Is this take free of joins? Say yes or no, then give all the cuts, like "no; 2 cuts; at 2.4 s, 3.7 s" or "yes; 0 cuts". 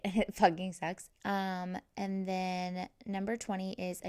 no; 1 cut; at 1.1 s